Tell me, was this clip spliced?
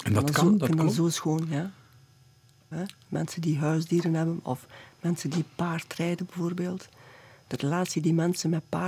yes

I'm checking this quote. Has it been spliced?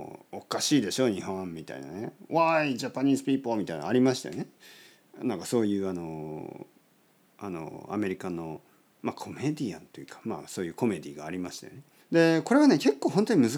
yes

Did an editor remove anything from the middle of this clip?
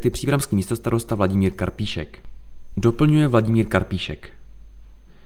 yes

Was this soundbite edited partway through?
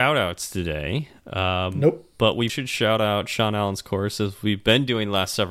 yes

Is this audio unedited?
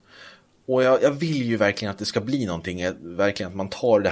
yes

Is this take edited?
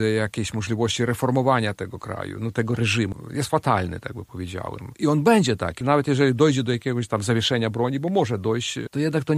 no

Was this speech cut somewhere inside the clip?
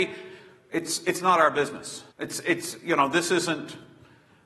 yes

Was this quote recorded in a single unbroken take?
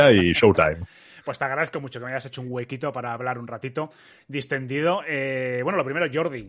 yes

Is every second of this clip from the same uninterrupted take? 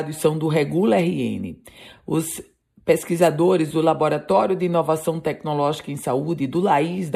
yes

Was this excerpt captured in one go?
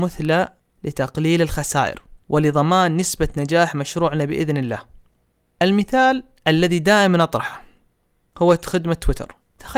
yes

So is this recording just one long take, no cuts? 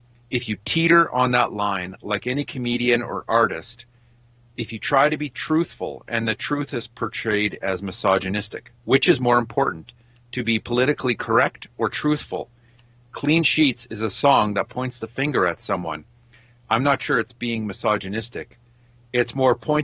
yes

